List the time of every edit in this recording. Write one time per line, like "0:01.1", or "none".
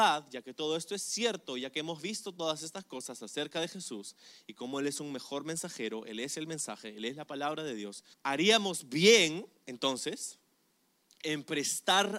0:08.1